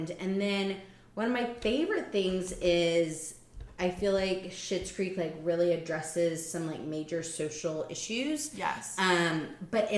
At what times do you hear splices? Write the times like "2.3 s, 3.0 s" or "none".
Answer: none